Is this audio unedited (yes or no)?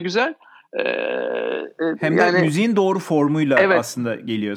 yes